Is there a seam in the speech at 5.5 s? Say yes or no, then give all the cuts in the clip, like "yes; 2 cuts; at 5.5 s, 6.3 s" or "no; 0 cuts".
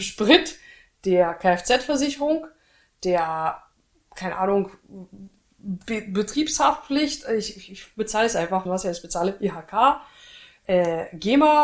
no; 1 cut; at 8.7 s